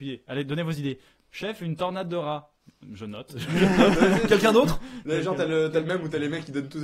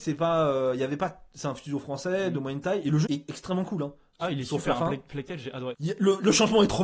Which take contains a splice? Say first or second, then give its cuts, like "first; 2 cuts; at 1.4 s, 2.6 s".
second; 2 cuts; at 3.1 s, 5.7 s